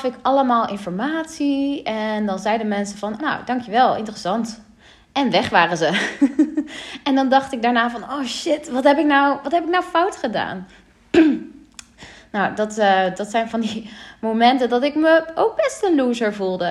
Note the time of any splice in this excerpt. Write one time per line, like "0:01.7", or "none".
0:03.2